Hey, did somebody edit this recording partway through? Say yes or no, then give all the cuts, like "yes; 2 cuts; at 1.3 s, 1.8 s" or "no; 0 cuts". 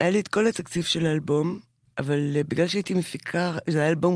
no; 0 cuts